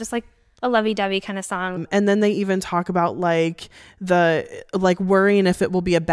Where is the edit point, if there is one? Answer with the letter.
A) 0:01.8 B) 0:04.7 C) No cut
A